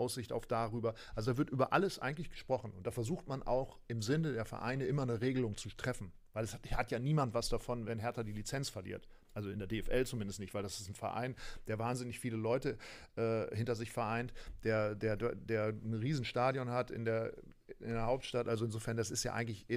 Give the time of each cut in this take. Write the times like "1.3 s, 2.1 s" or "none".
7.9 s